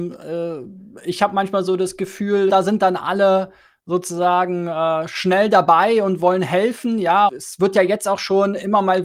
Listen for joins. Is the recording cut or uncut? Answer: cut